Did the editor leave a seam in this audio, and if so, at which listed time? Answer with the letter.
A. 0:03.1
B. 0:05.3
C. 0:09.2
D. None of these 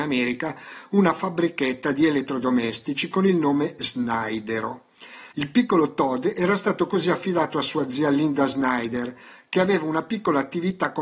B